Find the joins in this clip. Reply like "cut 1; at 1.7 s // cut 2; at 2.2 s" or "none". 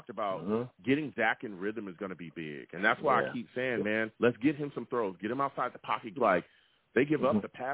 cut 1; at 4.1 s // cut 2; at 6.2 s